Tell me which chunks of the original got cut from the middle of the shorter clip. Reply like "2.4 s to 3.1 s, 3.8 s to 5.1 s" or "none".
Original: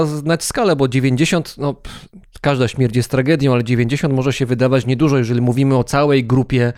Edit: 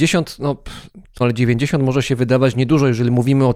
2.4 s to 3.5 s